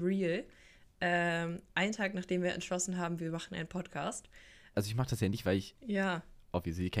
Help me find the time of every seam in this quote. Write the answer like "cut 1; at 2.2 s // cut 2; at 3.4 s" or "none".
cut 1; at 4.7 s // cut 2; at 5.8 s